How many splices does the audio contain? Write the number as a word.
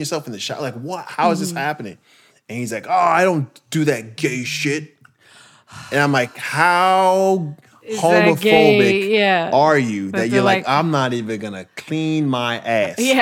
zero